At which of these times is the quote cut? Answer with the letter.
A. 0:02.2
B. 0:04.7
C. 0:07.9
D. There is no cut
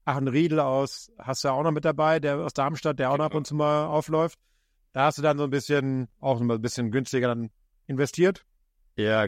D